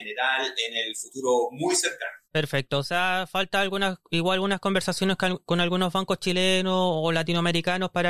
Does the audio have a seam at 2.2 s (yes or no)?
yes